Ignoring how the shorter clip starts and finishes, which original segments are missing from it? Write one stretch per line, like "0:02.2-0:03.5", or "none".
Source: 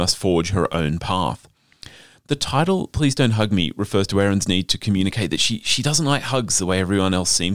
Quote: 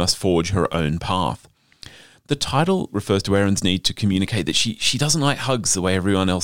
0:02.9-0:03.7